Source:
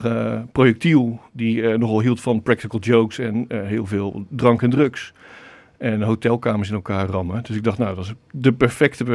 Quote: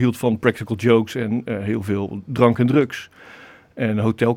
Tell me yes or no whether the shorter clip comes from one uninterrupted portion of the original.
yes